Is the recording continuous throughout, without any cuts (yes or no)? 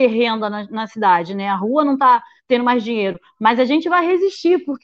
yes